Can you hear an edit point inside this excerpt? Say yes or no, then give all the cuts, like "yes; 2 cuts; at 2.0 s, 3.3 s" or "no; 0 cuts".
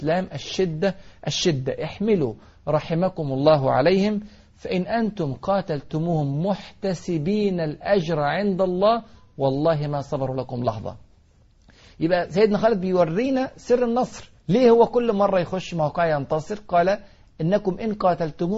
yes; 1 cut; at 14.4 s